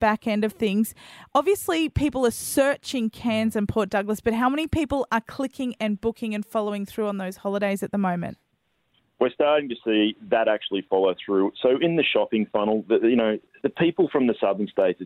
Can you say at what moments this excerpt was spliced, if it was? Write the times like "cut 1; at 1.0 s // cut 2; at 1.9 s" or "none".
none

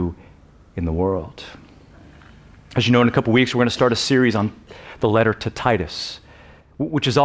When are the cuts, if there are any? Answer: none

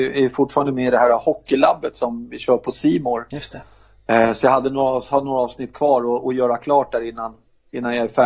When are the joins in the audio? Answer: none

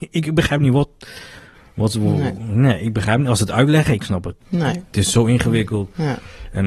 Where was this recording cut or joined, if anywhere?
cut 1; at 4.4 s

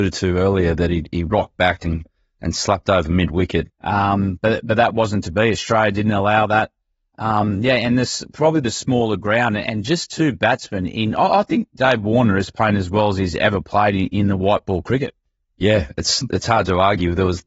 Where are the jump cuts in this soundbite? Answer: cut 1; at 3.7 s

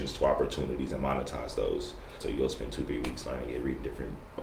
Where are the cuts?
cut 1; at 2.2 s

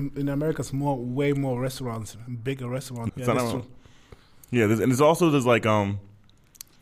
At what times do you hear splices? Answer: cut 1; at 3.1 s

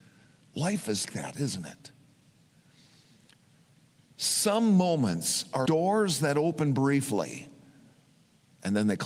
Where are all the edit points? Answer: cut 1; at 1.0 s // cut 2; at 5.7 s

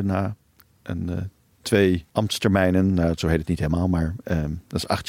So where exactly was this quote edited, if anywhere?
cut 1; at 2.1 s

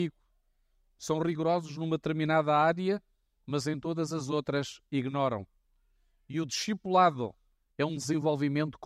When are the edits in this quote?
none

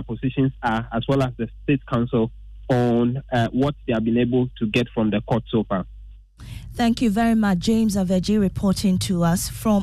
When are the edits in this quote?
none

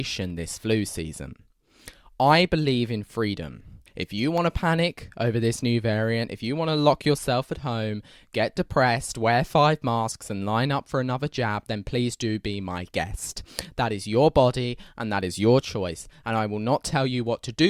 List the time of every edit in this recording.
cut 1; at 3.9 s

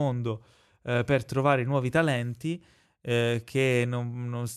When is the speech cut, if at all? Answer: none

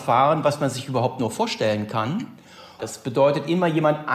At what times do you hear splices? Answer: cut 1; at 2.8 s

